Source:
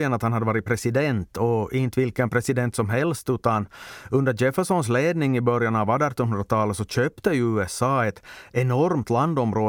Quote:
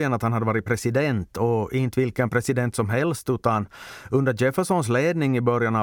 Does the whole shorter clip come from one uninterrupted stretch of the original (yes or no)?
yes